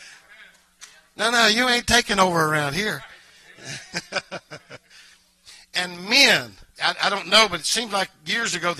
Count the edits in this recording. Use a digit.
1